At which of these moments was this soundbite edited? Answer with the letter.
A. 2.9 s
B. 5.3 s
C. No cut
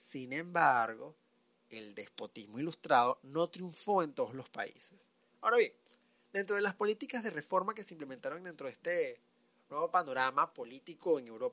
B